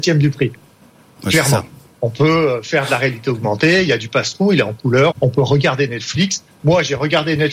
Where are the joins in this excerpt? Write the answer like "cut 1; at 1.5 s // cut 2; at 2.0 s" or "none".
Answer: cut 1; at 5.1 s